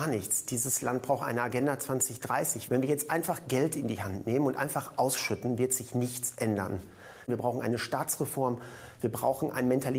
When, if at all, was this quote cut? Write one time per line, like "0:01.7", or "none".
0:02.7